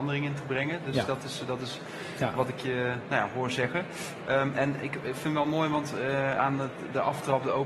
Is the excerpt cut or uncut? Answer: uncut